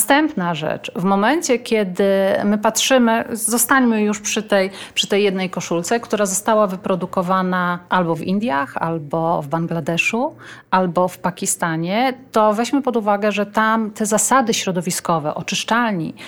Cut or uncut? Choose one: cut